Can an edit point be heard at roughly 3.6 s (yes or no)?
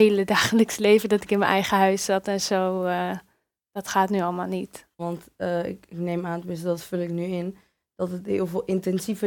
no